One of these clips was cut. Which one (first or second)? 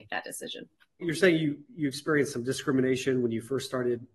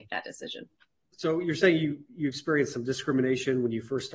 first